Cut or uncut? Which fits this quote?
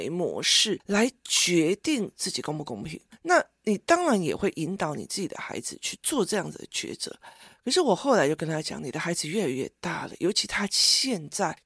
uncut